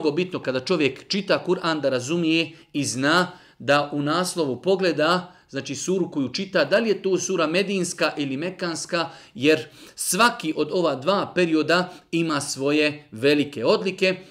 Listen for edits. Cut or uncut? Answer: uncut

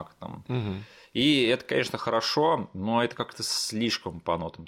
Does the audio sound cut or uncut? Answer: uncut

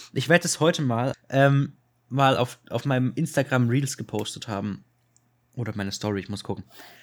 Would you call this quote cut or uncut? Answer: cut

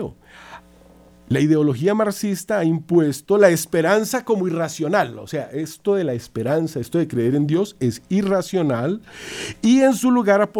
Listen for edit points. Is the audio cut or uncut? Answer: uncut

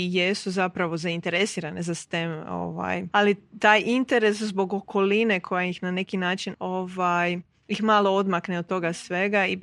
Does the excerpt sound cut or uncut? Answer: cut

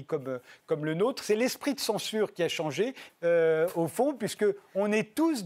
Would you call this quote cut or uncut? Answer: cut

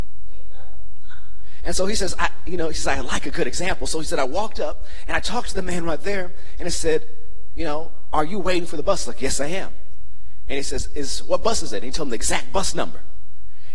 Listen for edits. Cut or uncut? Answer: uncut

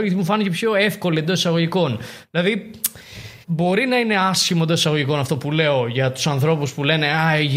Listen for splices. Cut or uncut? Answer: cut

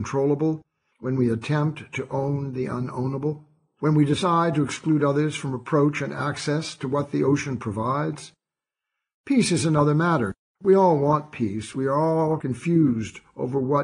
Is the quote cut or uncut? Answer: uncut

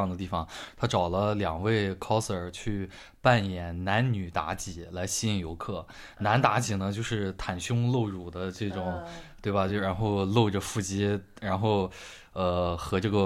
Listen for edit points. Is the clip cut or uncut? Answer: uncut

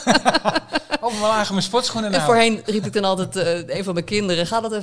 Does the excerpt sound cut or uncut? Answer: uncut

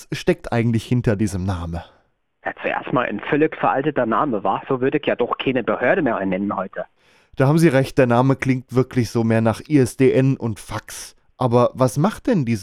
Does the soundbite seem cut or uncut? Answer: uncut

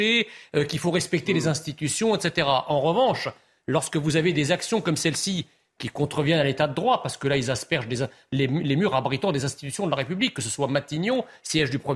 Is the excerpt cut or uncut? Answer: uncut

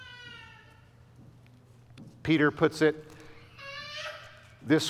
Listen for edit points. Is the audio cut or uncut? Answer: uncut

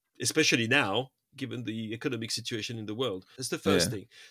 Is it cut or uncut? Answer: cut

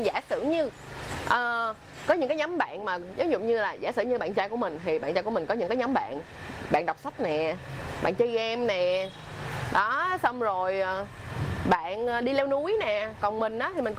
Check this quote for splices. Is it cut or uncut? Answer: uncut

